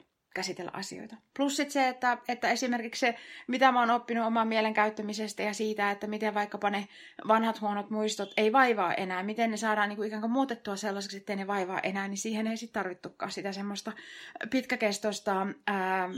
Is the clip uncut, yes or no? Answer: yes